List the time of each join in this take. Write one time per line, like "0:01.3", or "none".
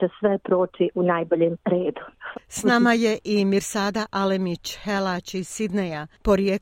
0:02.3